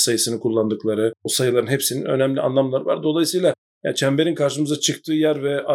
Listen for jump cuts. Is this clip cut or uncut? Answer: uncut